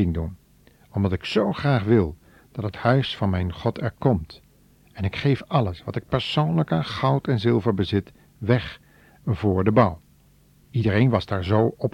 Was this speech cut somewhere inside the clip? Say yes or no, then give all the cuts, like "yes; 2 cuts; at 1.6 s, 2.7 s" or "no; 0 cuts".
yes; 1 cut; at 10.7 s